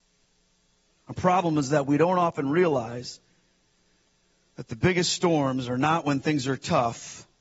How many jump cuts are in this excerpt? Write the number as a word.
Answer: one